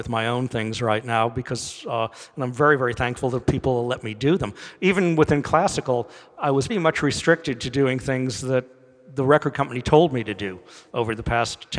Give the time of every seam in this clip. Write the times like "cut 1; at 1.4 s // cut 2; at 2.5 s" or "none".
cut 1; at 6.7 s